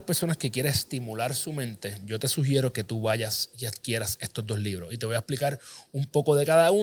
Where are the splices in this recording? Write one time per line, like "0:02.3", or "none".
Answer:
none